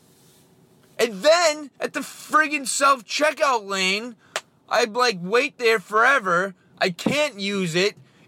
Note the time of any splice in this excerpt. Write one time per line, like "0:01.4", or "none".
0:01.8